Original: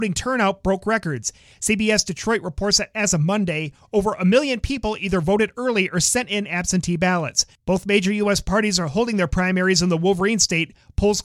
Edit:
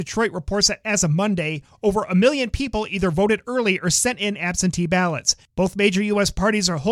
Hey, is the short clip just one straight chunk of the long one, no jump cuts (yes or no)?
yes